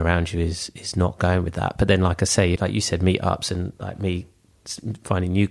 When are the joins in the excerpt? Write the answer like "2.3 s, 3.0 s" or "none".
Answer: 2.6 s